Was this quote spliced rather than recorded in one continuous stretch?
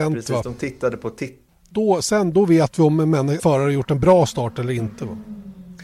yes; 2 cuts; at 1.5 s, 3.4 s

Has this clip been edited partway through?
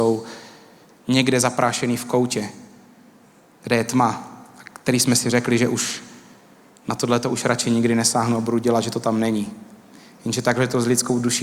no; 0 cuts

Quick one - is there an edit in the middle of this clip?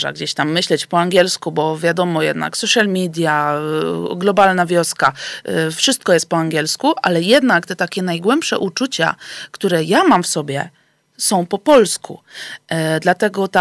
no; 0 cuts

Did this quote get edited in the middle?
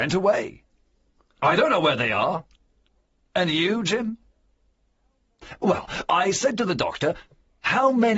no; 0 cuts

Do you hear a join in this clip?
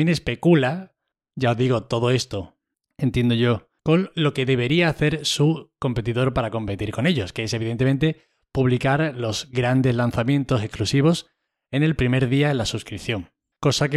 yes; 1 cut; at 3.8 s

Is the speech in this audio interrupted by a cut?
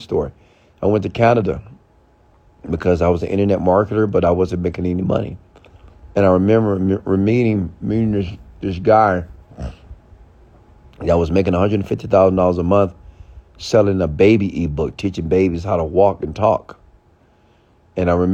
no; 0 cuts

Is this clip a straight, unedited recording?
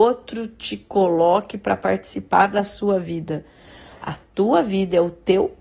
yes; 0 cuts

